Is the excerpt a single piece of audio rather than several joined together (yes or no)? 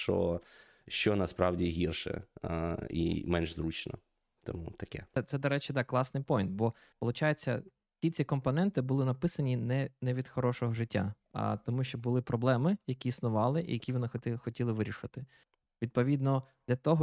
yes